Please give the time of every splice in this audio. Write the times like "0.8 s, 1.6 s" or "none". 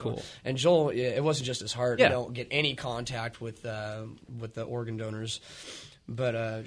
2.0 s